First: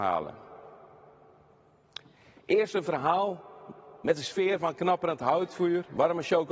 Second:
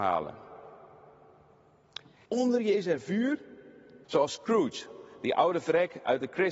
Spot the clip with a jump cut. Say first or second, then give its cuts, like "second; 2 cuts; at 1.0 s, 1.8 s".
second; 2 cuts; at 2.2 s, 4.0 s